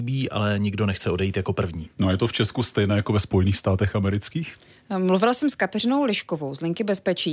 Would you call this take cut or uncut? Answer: uncut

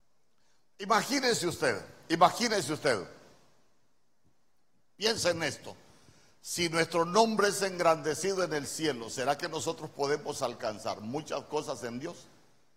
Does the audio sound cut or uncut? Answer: uncut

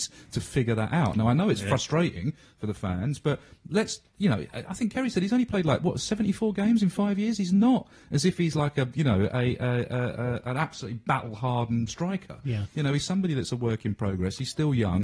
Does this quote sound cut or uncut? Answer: uncut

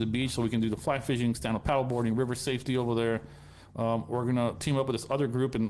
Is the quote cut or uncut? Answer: uncut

